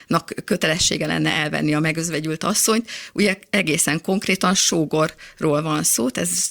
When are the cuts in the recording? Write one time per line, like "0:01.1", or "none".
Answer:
none